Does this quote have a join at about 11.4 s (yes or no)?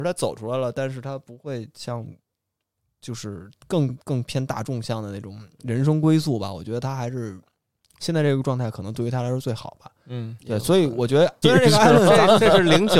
yes